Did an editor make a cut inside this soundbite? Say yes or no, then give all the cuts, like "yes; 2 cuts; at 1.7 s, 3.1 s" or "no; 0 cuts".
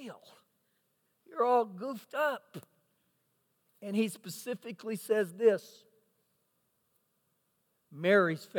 no; 0 cuts